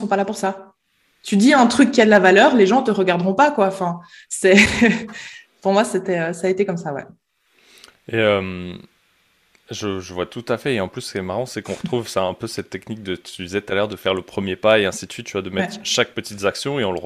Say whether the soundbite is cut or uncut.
uncut